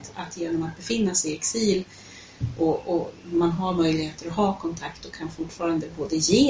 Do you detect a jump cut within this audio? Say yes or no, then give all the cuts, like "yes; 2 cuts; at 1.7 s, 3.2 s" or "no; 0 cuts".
no; 0 cuts